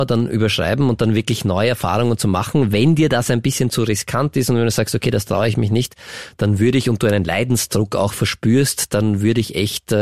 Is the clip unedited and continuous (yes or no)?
yes